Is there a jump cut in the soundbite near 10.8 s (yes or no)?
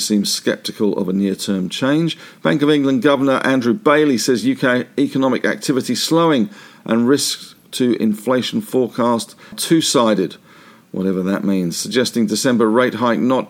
no